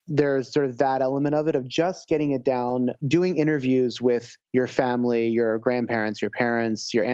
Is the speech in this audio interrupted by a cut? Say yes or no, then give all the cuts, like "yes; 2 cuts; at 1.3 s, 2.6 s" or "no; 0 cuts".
no; 0 cuts